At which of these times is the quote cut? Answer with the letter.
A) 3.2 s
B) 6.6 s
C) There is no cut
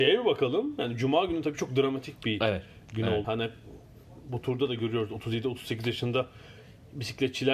A